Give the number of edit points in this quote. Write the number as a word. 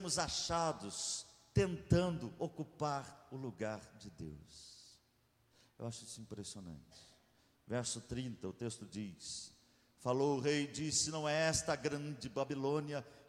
zero